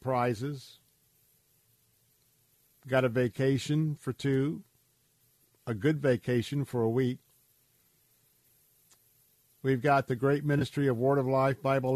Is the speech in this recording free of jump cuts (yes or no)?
yes